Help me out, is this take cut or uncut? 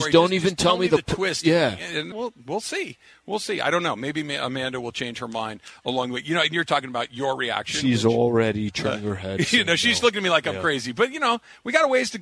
cut